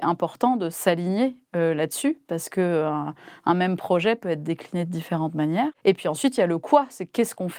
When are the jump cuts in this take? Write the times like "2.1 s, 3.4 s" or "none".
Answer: none